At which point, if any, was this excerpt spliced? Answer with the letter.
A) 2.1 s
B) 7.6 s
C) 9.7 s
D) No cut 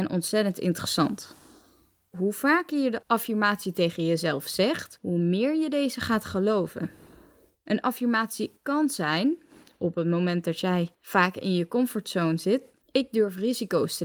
A